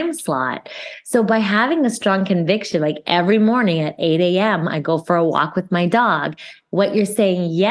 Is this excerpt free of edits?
yes; 0 cuts

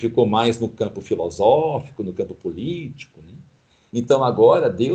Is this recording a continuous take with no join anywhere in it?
no; 1 cut; at 3.9 s

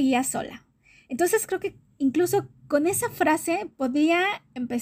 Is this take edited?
no; 0 cuts

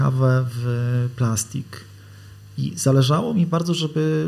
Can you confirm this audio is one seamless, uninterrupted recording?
yes; 0 cuts

